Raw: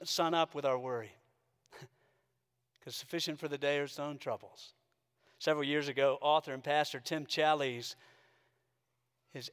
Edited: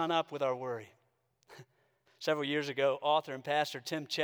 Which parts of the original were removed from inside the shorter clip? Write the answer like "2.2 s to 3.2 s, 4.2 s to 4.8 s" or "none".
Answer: 2.3 s to 5.2 s